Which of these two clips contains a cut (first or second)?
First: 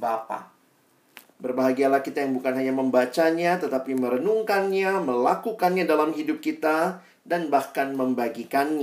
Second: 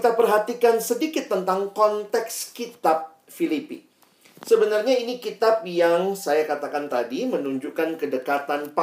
first